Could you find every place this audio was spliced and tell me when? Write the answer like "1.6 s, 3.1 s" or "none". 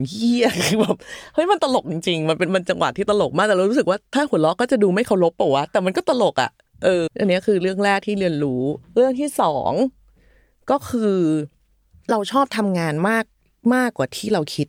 7.1 s, 8.8 s